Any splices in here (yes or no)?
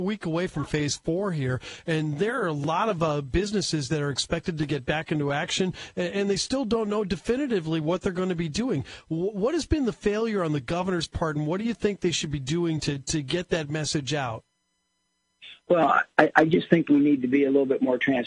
no